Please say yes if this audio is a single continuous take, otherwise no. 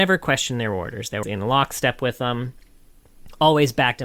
no